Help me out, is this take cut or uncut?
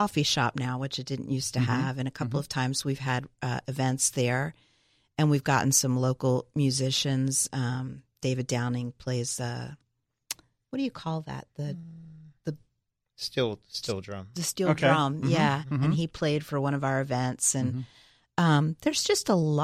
uncut